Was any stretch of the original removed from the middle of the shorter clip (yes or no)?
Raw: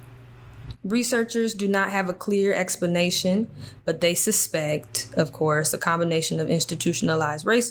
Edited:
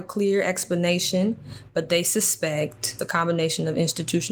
yes